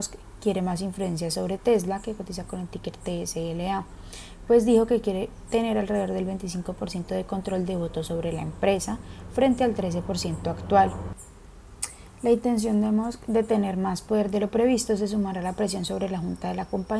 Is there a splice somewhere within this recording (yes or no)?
no